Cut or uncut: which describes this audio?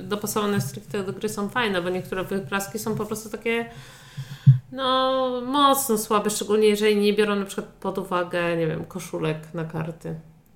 uncut